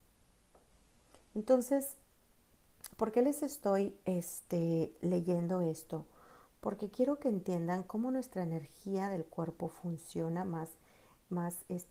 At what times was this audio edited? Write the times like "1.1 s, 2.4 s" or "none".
none